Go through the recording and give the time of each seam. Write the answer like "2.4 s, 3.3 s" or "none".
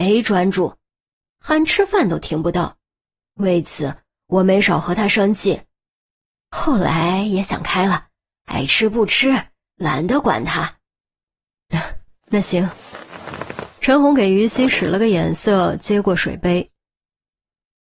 none